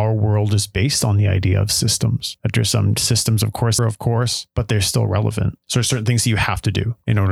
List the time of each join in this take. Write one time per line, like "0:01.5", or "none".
0:03.8
0:05.7